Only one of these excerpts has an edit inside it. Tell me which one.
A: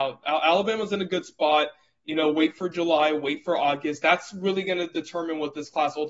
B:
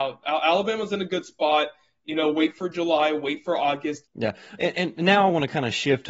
B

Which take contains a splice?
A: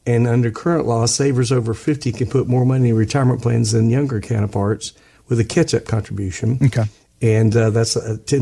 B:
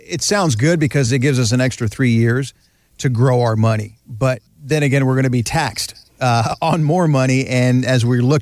B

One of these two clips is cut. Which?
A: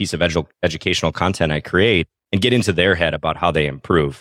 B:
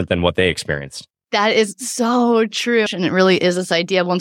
B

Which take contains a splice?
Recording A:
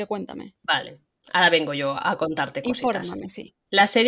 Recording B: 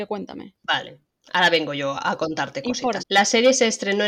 B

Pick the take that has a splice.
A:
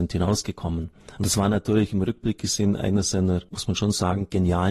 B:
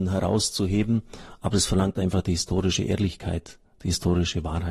A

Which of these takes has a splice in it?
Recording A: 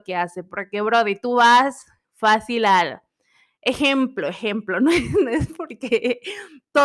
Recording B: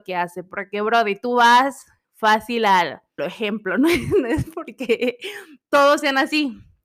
B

